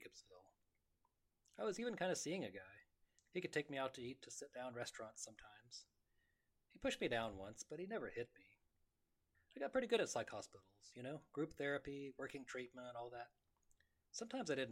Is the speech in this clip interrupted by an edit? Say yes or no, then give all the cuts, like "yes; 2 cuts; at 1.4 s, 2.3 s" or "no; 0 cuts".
yes; 2 cuts; at 3.2 s, 9.3 s